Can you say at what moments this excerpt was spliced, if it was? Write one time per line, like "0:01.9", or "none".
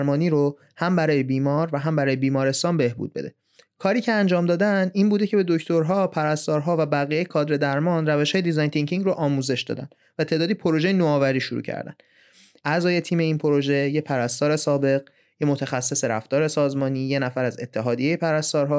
0:12.6